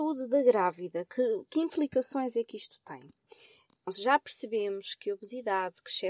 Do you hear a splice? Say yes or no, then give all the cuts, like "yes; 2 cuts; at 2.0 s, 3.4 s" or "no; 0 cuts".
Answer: no; 0 cuts